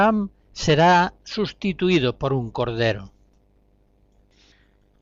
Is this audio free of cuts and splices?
yes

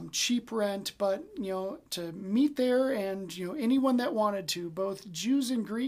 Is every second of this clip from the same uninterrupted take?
no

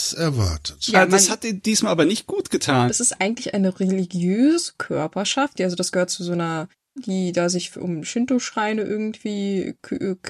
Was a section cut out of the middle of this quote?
yes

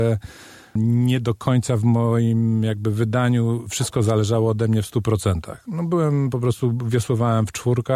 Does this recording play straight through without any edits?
yes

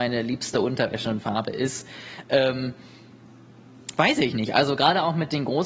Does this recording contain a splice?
no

